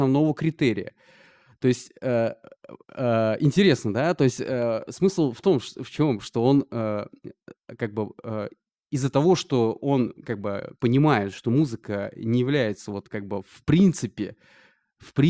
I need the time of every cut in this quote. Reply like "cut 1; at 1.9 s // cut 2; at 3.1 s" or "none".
none